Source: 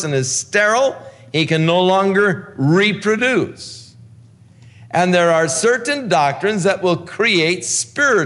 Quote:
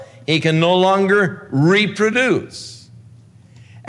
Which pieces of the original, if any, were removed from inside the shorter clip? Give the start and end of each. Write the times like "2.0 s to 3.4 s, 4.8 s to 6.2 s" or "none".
none